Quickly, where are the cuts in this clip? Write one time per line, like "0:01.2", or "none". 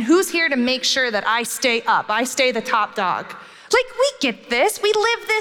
none